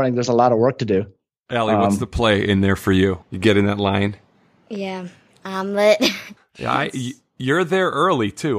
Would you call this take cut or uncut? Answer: cut